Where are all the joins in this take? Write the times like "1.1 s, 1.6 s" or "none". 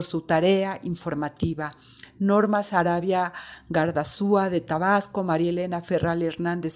none